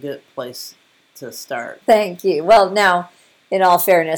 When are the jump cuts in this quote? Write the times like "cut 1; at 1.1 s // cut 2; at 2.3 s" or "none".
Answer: cut 1; at 1.8 s